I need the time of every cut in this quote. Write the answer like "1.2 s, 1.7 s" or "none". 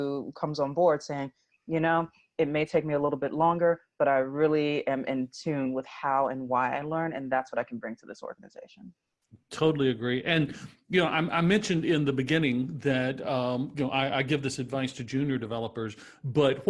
none